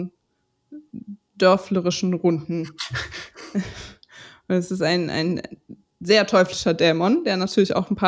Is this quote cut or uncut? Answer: uncut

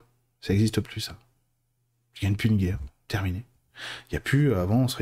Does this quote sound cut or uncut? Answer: uncut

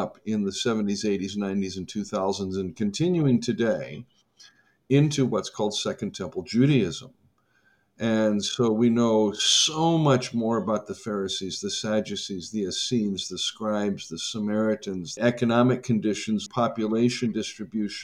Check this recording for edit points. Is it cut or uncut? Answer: cut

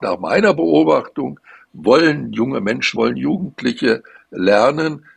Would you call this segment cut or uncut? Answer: cut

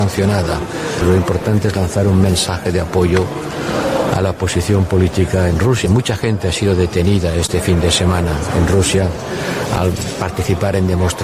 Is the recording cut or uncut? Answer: uncut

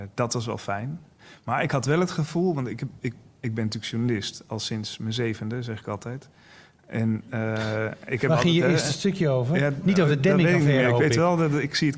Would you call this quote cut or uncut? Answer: uncut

